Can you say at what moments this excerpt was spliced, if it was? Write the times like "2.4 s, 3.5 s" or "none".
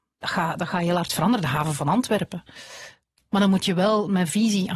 3.3 s